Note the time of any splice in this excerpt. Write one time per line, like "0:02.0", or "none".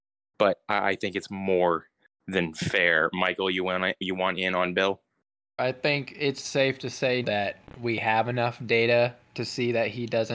0:05.6
0:07.2